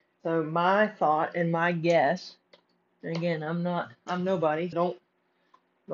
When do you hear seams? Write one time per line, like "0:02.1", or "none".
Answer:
0:04.7